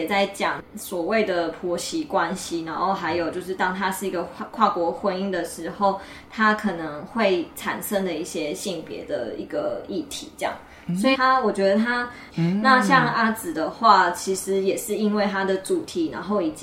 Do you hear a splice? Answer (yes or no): yes